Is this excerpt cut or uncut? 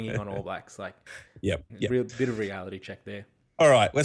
cut